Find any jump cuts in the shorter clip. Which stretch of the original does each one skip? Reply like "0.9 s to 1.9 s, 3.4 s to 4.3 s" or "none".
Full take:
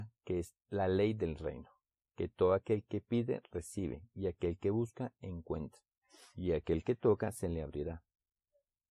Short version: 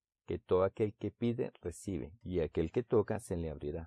4.1 s to 6.3 s